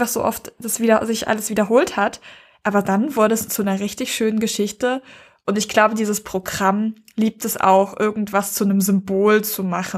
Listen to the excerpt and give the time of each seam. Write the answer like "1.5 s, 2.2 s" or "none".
none

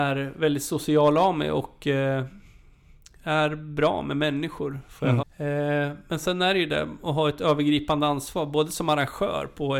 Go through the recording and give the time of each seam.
5.2 s

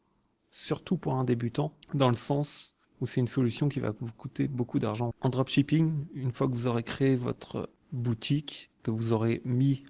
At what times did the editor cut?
1.8 s, 5.1 s

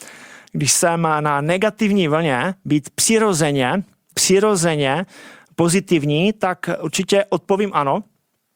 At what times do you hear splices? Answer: 4.1 s

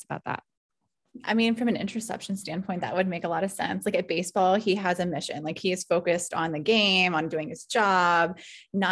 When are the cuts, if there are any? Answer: none

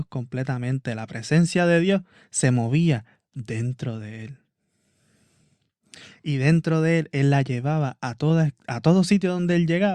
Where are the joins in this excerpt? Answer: none

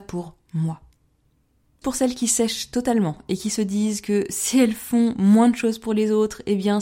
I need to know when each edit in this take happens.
1.8 s

